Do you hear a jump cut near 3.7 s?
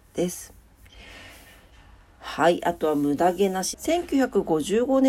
yes; 1 cut; at 3.7 s

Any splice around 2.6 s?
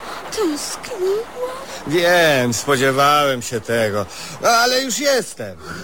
no; 0 cuts

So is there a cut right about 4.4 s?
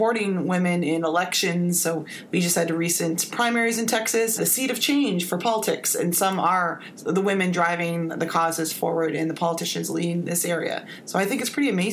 yes; 1 cut; at 4.4 s

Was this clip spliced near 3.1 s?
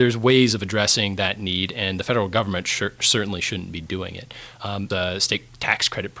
no; 1 cut; at 4.9 s

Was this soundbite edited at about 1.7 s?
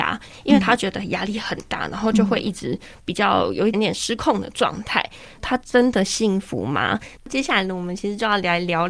no; 3 cuts; at 3.7 s, 5.4 s, 7.2 s

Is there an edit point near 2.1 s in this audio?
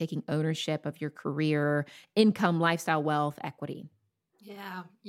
no; 0 cuts

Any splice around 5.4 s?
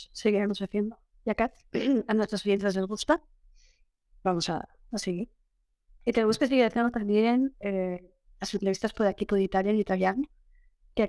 no; 0 cuts

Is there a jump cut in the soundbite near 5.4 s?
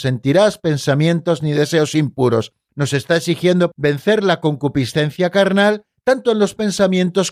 no; 1 cut; at 3.7 s

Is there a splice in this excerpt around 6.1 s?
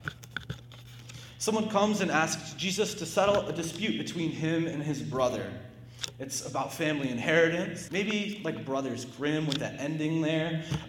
no; 1 cut; at 7.9 s

